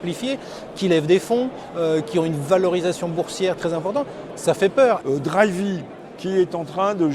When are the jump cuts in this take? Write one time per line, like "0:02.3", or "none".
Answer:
0:05.0
0:06.2